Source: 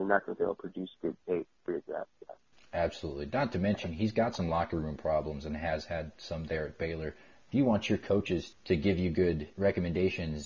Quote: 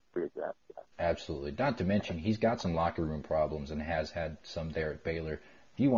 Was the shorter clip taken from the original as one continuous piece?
no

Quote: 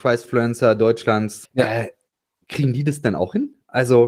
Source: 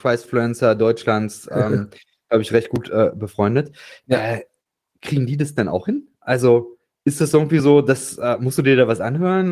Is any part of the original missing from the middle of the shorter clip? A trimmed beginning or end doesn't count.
yes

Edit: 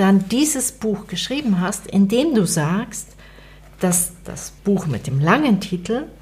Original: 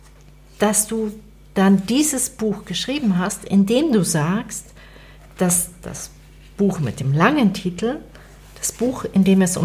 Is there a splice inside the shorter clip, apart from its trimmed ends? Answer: yes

